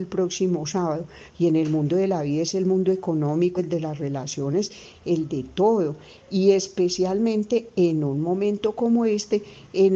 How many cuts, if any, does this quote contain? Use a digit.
2